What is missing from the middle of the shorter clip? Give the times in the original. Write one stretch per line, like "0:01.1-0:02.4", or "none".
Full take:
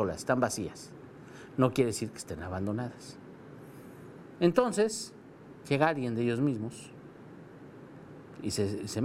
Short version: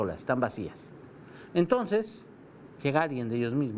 0:01.5-0:04.4